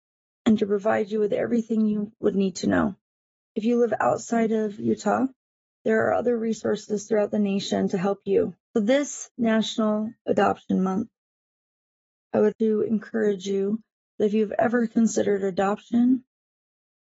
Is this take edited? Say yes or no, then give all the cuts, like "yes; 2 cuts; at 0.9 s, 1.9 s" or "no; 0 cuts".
yes; 2 cuts; at 8.6 s, 12.5 s